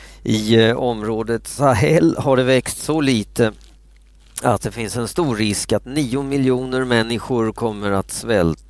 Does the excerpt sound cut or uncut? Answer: uncut